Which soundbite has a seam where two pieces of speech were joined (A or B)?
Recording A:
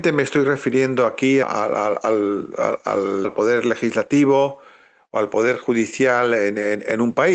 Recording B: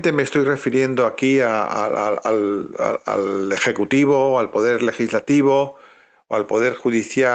A